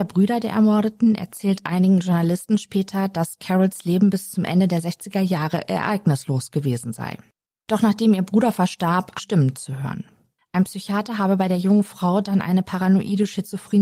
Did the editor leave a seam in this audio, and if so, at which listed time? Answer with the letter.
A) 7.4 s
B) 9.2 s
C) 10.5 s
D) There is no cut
B